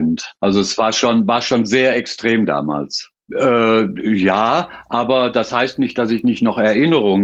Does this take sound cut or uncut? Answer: cut